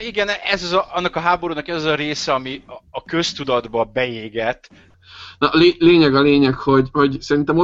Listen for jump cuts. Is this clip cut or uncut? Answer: cut